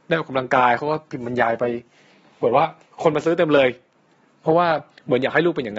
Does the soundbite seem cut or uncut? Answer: uncut